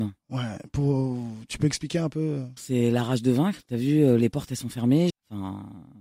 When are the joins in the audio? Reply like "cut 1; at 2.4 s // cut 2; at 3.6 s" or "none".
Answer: cut 1; at 2.6 s // cut 2; at 5.1 s